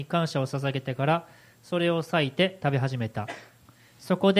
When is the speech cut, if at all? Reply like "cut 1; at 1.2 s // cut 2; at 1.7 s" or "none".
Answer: none